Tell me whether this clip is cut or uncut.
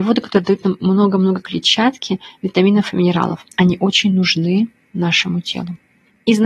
uncut